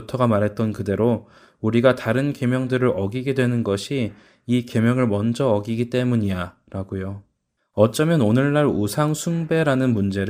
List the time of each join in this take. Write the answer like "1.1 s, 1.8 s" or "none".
7.6 s